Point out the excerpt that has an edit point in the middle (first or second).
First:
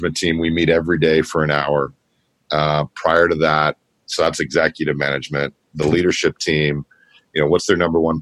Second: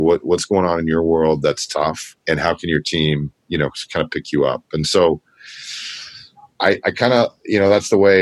second